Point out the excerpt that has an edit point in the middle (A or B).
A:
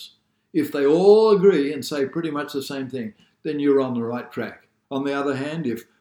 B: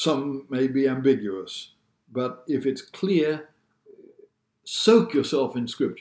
A